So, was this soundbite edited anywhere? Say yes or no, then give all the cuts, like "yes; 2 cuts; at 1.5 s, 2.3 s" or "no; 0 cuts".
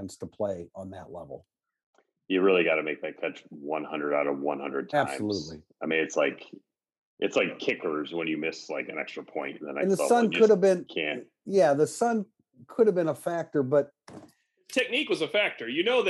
no; 0 cuts